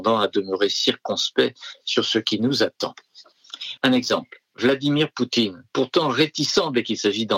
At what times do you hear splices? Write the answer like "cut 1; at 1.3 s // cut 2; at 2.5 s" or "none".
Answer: cut 1; at 3.8 s